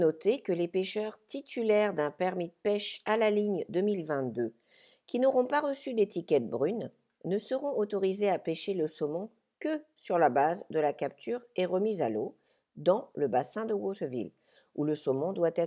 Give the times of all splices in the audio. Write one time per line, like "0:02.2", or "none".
none